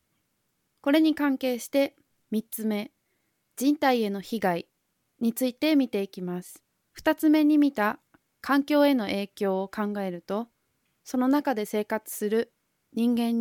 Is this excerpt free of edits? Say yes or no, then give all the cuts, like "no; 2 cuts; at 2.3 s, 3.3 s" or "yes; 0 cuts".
no; 1 cut; at 6.9 s